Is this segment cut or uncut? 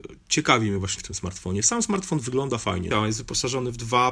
cut